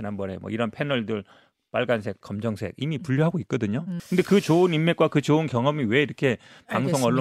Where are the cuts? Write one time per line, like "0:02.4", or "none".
0:02.2
0:04.0